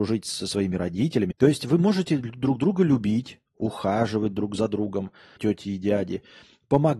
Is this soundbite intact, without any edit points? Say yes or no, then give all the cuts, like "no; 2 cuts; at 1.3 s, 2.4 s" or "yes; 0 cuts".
no; 2 cuts; at 1.3 s, 5.4 s